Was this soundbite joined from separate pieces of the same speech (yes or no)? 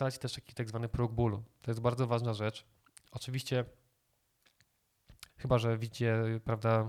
yes